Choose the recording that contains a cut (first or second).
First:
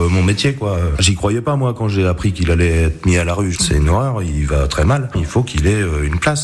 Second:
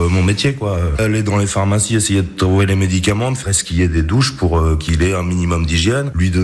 first